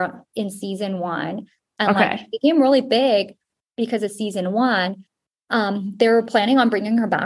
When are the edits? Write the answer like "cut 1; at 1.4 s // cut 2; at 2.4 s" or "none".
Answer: none